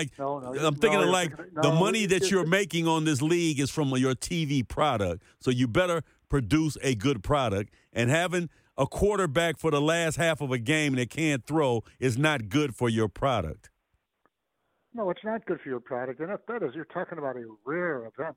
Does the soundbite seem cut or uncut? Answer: uncut